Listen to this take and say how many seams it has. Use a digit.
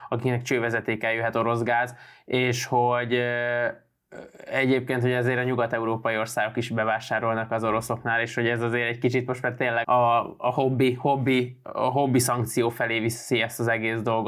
1